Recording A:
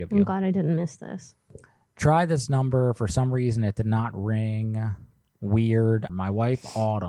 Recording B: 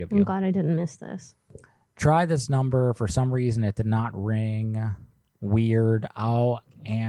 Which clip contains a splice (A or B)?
A